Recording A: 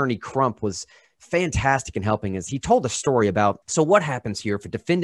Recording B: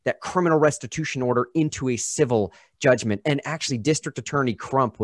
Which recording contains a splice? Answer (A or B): A